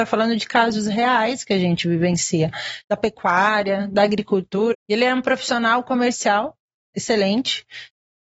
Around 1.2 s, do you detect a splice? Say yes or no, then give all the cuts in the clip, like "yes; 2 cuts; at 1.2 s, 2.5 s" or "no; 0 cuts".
no; 2 cuts; at 2.8 s, 4.7 s